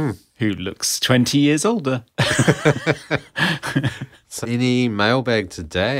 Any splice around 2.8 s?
no; 1 cut; at 4.4 s

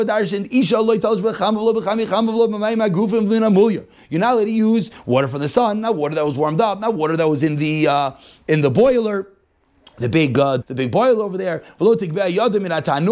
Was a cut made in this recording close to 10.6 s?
yes; 1 cut; at 10.6 s

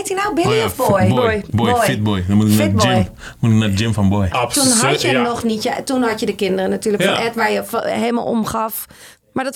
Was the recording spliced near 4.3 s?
yes; 1 cut; at 4.3 s

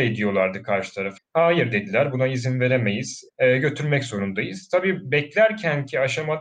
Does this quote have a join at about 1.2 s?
yes; 2 cuts; at 1.2 s, 3.3 s

